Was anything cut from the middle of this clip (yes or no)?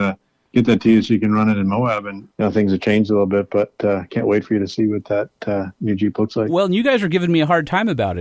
no